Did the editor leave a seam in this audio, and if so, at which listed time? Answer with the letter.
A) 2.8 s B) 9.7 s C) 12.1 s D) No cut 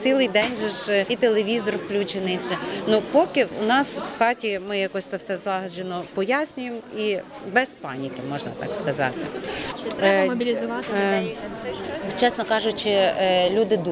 B